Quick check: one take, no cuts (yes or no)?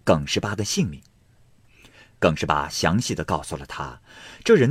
yes